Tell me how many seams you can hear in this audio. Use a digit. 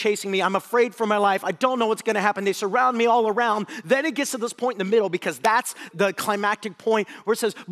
1